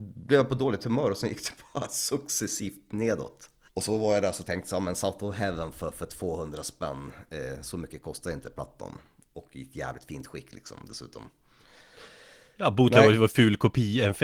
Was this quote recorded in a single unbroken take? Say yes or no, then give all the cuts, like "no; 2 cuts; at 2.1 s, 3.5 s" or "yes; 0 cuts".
no; 1 cut; at 3.7 s